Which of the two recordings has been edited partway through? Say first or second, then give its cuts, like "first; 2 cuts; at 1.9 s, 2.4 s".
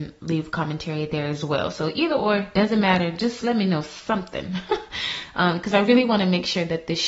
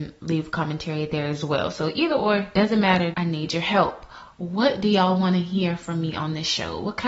second; 1 cut; at 3.1 s